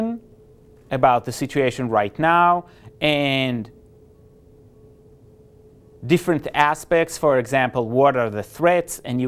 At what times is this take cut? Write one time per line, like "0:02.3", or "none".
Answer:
none